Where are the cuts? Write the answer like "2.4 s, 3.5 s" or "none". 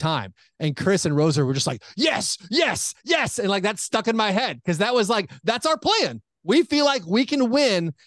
3.0 s